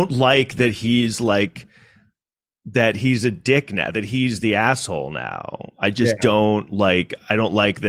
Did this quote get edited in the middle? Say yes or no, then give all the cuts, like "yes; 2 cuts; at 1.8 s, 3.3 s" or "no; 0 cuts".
no; 0 cuts